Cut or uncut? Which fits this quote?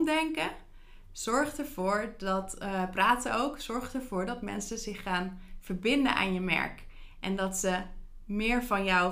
uncut